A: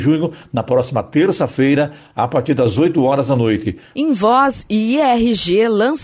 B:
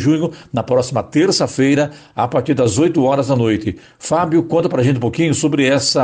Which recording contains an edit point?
A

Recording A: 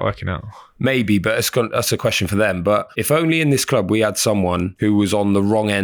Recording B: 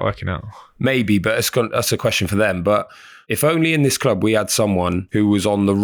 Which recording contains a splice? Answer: A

